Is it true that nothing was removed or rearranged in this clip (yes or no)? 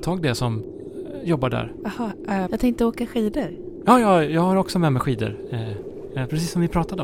no